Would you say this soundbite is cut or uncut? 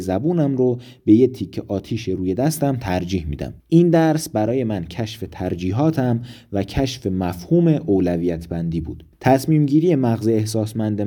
cut